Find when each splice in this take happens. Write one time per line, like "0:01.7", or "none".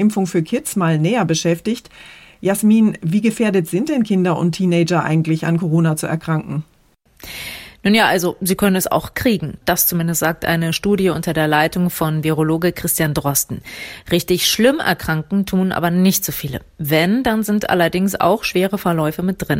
0:09.6